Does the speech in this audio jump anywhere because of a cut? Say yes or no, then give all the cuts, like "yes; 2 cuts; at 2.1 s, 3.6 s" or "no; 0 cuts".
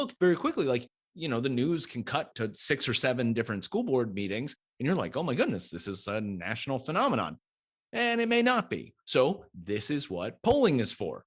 no; 0 cuts